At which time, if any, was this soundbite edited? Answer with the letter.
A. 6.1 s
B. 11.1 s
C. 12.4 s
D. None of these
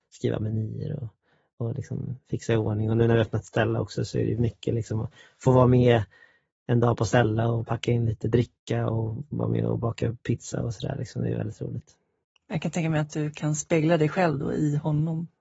D